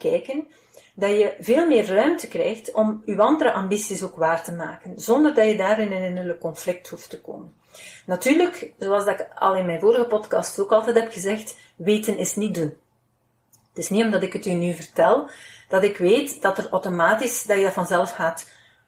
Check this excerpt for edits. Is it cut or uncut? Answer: uncut